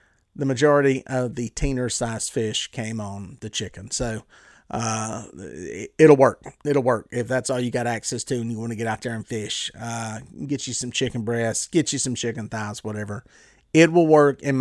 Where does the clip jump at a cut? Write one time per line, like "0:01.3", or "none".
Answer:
none